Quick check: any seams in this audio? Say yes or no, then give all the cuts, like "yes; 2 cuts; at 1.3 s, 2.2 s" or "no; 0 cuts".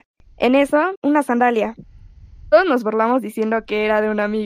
yes; 1 cut; at 0.9 s